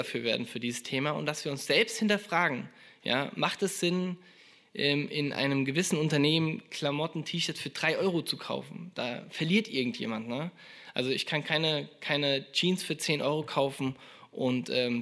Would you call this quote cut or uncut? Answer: uncut